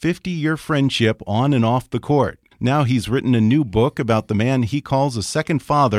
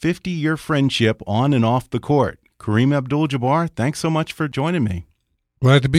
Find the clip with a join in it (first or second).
first